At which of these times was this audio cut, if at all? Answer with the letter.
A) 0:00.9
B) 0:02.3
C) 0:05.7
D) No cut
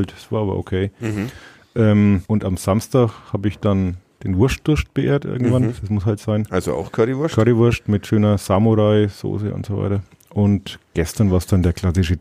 B